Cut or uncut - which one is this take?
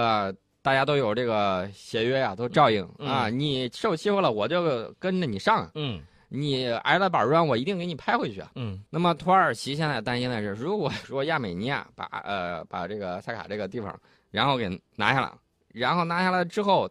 cut